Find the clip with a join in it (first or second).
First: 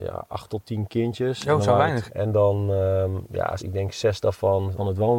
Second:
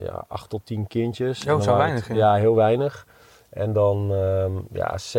first